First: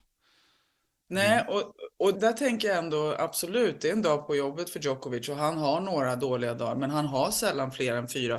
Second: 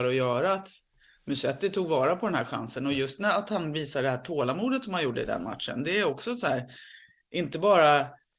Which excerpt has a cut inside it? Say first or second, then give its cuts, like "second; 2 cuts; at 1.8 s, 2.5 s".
first; 1 cut; at 2.1 s